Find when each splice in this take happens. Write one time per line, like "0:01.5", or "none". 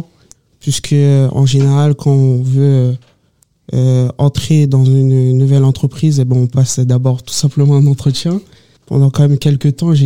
0:08.8